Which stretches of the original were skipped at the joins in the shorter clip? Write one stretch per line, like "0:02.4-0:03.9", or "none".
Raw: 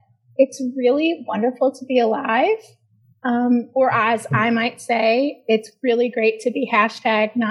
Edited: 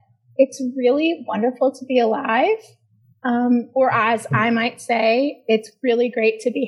none

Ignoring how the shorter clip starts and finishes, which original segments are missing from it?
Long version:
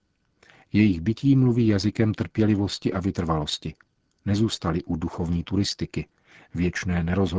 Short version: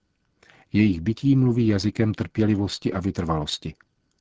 none

